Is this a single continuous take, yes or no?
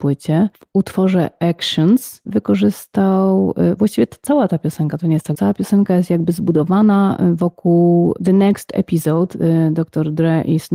no